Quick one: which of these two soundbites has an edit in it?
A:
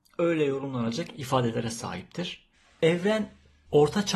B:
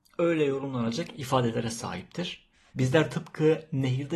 B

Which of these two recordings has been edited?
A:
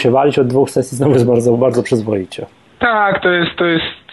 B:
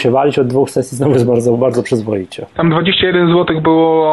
B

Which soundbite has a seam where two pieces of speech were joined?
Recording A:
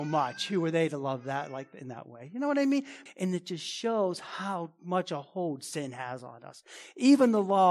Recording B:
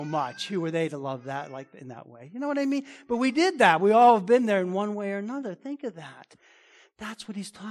A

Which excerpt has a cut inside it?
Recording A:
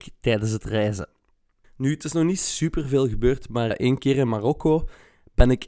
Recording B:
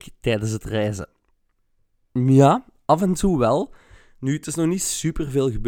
A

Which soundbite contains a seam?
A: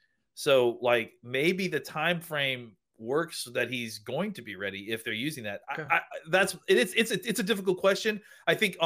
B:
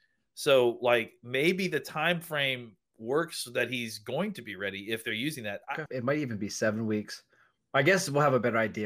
B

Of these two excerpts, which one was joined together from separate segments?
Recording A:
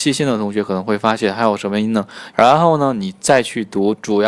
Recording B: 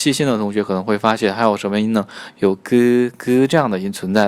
A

